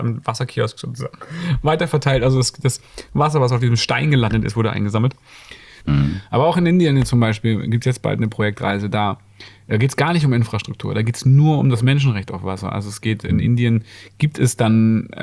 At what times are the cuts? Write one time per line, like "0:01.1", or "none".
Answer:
0:05.8

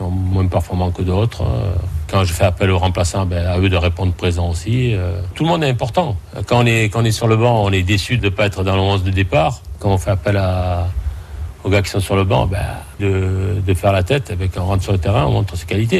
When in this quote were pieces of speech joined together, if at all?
0:13.0

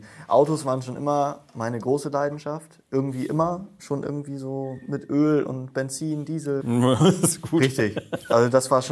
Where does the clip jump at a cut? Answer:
0:06.6

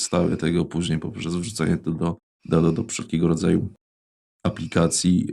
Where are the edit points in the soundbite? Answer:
none

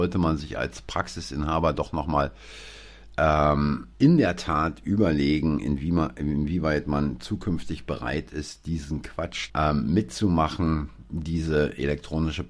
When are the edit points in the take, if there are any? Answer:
0:03.9
0:09.5

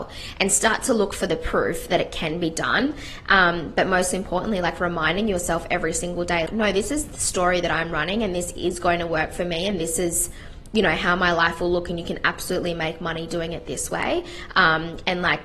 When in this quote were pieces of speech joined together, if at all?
0:06.5

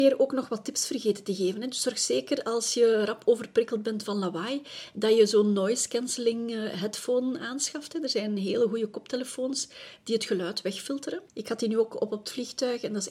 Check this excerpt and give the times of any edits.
0:11.3

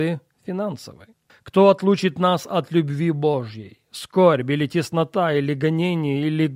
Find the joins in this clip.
0:01.3

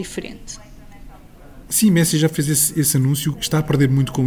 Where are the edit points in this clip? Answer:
0:03.3

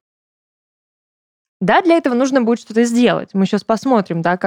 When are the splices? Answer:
none

